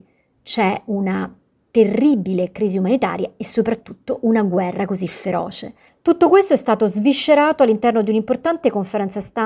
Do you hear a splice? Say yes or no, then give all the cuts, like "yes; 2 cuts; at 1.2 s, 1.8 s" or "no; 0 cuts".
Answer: yes; 1 cut; at 5.9 s